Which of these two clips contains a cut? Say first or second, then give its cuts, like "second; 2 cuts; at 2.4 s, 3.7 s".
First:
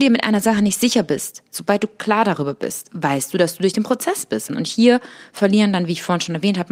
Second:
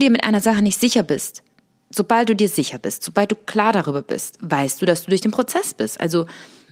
first; 2 cuts; at 1.5 s, 4.5 s